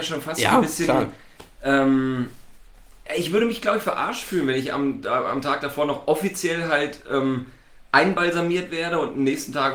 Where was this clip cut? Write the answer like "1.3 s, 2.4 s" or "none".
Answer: none